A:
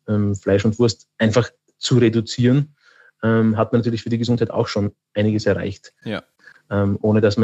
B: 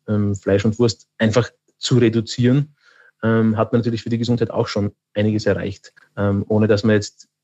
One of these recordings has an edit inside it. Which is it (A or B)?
B